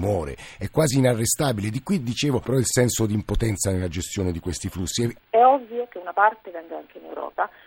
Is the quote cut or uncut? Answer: cut